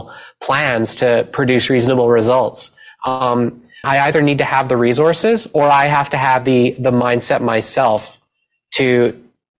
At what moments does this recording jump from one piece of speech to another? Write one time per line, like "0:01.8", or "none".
0:03.8